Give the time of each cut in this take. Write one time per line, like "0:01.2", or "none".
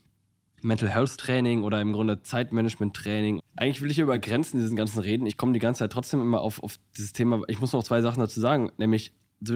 0:03.4